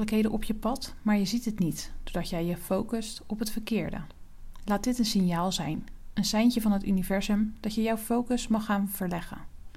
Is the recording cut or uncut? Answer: uncut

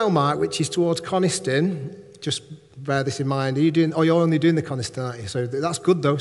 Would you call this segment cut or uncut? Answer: uncut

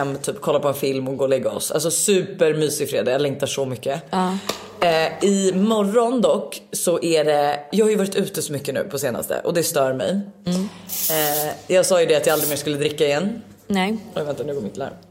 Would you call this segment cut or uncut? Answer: cut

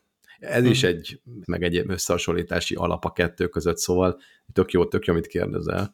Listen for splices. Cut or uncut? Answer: cut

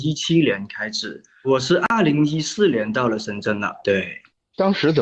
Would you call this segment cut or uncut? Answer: cut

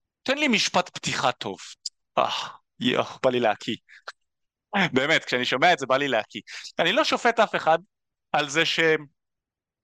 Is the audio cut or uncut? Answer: uncut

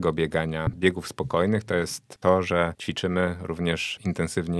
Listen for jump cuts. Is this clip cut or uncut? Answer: uncut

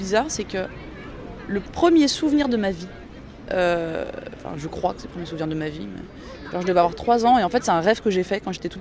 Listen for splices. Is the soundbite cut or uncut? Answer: uncut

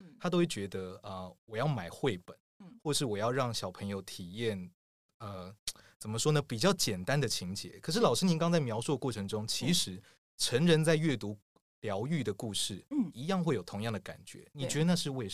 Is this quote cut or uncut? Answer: cut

